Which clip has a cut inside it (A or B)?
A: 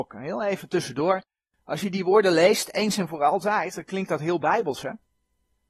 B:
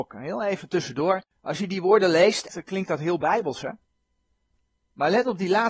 B